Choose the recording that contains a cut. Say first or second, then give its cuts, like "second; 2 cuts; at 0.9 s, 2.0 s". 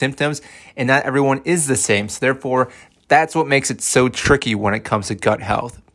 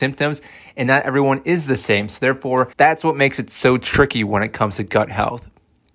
second; 1 cut; at 2.7 s